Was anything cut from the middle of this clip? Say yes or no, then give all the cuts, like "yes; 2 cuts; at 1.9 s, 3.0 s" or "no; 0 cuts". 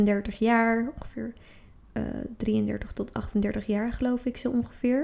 no; 0 cuts